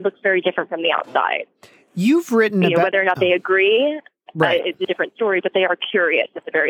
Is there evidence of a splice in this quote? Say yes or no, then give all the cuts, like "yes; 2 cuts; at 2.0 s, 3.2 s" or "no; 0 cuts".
no; 0 cuts